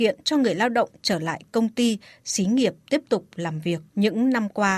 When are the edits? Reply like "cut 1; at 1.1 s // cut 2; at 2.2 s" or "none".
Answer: cut 1; at 3.9 s

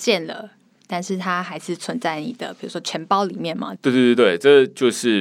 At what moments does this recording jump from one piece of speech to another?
cut 1; at 3.8 s

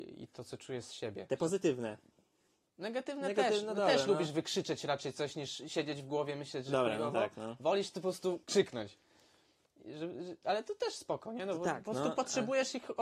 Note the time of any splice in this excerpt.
none

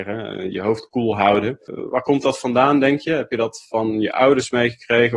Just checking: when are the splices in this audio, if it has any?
none

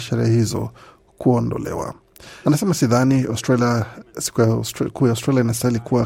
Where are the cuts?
cut 1; at 2.4 s

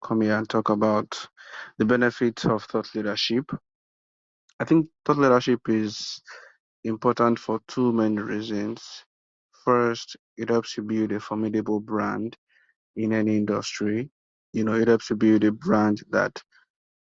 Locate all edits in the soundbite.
none

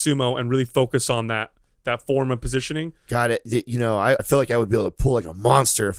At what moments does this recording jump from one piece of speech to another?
cut 1; at 4.2 s

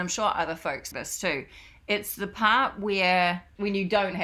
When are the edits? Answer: cut 1; at 0.9 s

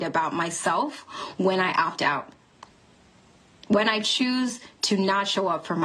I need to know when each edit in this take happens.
none

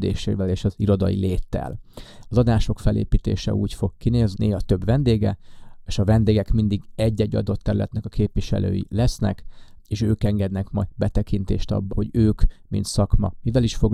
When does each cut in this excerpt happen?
cut 1; at 2.2 s // cut 2; at 4.3 s // cut 3; at 11.9 s

